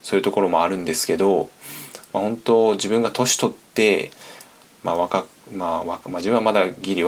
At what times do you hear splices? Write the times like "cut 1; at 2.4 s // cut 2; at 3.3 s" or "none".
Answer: cut 1; at 4.8 s